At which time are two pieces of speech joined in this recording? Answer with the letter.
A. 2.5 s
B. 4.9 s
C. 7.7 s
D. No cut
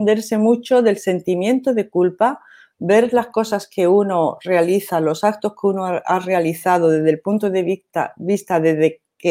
D